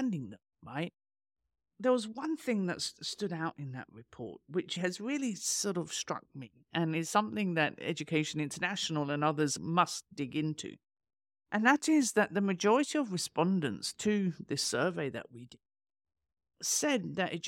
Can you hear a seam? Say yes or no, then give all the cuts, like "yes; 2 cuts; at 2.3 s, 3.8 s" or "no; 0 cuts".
no; 0 cuts